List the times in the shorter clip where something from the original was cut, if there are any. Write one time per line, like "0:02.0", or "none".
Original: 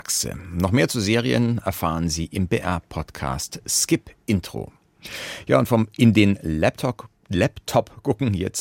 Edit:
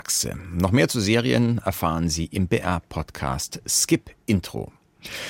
none